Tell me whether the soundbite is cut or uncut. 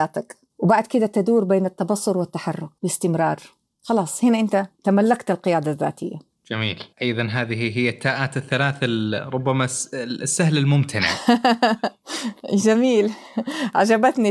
cut